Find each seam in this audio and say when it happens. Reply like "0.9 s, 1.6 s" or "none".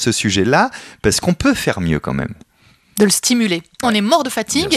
3.8 s